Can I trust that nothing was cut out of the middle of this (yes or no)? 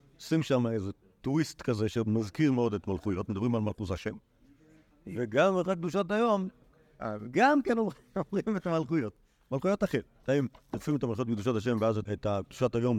no